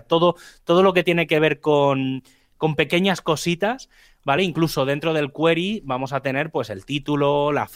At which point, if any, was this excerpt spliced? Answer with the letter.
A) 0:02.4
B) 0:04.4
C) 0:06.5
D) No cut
D